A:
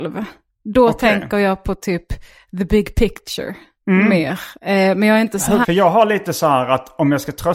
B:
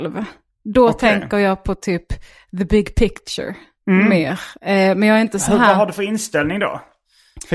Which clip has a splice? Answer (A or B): A